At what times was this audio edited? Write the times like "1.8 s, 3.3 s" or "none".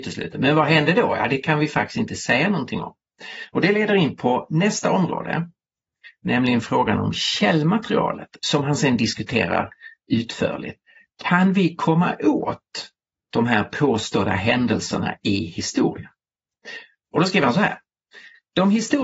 none